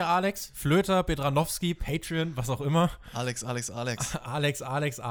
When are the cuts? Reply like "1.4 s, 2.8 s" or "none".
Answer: none